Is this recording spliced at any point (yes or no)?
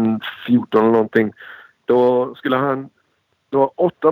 no